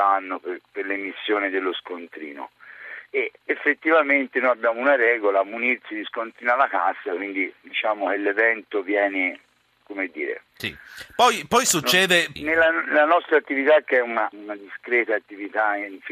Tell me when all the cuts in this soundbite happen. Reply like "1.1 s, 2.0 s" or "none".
10.5 s, 12.4 s, 14.3 s